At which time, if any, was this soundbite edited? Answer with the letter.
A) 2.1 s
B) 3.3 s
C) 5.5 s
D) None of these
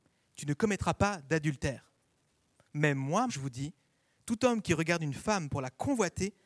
B